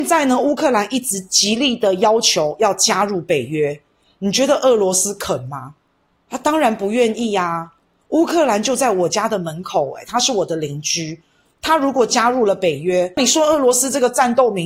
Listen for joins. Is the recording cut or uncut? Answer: uncut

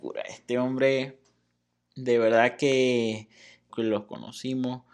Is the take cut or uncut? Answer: cut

